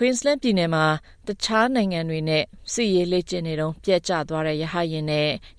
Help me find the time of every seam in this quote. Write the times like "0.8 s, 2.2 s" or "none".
none

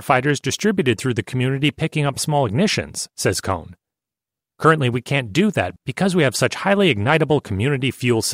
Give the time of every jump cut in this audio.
5.8 s

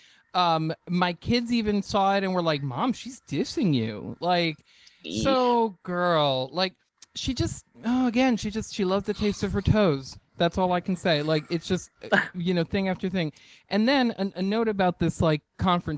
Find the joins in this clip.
none

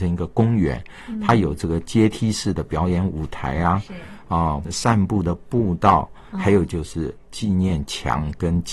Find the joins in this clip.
4.6 s

